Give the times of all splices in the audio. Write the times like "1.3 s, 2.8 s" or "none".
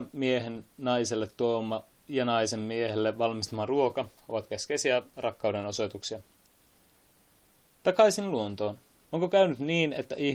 9.0 s